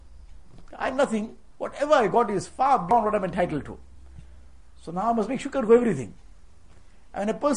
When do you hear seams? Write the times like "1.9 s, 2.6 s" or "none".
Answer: none